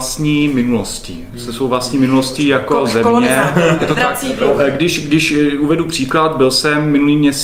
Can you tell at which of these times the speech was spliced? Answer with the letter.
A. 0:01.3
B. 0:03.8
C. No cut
B